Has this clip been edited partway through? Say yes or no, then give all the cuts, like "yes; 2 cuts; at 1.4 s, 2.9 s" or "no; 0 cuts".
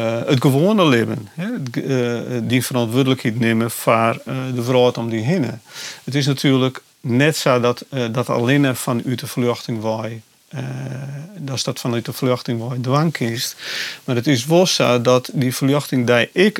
no; 0 cuts